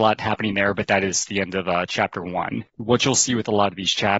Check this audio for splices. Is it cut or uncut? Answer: uncut